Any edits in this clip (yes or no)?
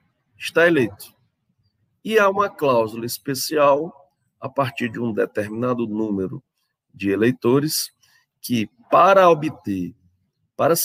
no